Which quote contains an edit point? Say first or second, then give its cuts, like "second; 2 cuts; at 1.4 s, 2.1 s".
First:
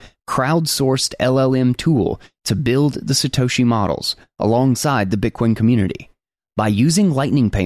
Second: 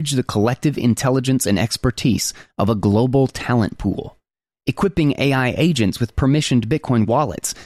second; 1 cut; at 4.5 s